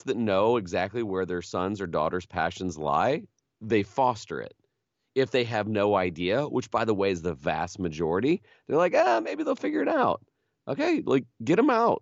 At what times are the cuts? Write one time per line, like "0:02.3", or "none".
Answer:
none